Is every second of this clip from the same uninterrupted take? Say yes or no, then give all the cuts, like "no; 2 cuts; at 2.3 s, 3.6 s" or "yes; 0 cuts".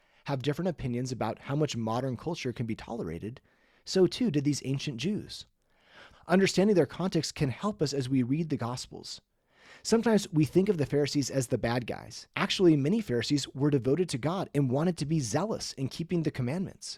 no; 2 cuts; at 6.1 s, 12.3 s